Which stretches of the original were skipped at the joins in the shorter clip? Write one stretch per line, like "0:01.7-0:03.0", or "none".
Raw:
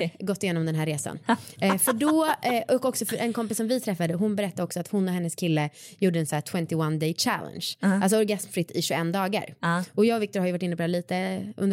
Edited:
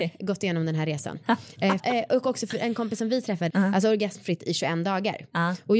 0:01.8-0:02.4
0:04.1-0:07.8